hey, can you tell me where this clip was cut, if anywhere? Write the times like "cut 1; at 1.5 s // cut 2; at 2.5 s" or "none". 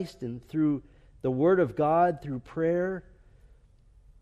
cut 1; at 2.2 s